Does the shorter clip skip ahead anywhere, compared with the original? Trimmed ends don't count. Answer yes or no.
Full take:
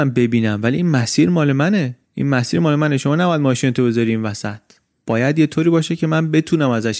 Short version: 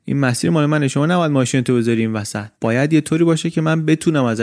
yes